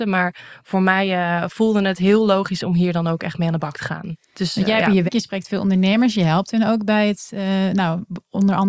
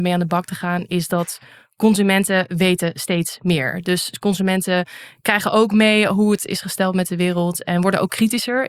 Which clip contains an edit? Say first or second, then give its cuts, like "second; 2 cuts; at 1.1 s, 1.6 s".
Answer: first; 1 cut; at 5.1 s